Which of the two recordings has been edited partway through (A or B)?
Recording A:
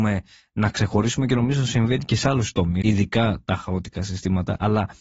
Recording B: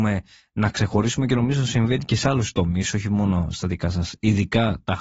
A